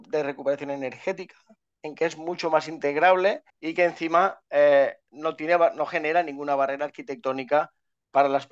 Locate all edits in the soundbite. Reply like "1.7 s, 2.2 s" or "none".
3.5 s